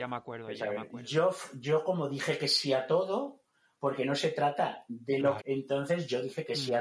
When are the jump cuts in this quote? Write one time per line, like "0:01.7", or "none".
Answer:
0:05.4